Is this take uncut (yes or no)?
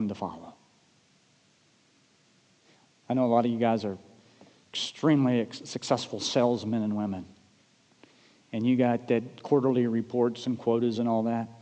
yes